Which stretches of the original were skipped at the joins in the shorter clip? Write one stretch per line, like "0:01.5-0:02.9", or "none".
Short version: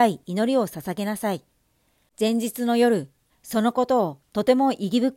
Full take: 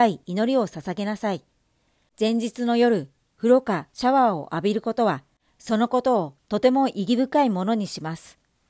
0:03.3-0:05.4